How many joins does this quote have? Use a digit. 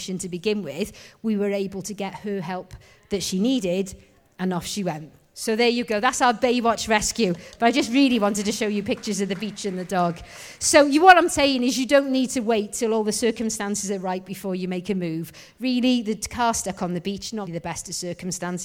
1